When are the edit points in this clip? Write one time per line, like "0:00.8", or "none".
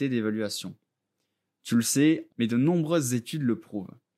0:02.3